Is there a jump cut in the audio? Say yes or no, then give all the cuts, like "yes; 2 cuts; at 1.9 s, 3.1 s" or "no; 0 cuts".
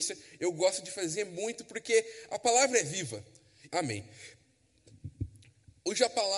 yes; 1 cut; at 3.7 s